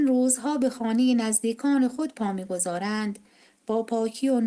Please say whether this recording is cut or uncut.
uncut